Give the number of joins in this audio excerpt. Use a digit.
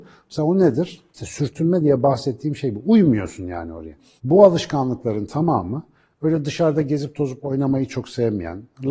2